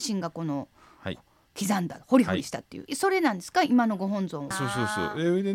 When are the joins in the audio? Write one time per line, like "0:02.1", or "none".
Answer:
0:02.9
0:04.5